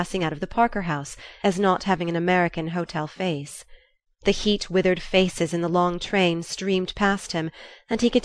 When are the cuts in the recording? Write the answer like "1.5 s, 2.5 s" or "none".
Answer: 1.4 s, 4.1 s